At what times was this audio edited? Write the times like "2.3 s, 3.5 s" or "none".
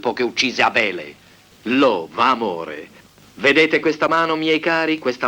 none